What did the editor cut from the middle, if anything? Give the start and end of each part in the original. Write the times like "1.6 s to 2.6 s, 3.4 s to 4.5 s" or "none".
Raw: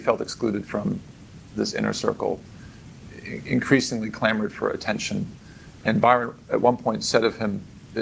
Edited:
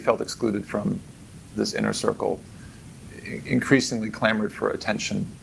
none